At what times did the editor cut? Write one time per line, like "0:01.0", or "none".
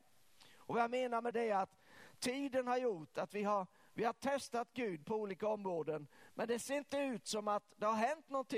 0:01.3